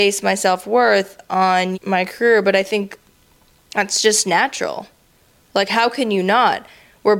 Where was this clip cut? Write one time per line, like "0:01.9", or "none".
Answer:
0:01.7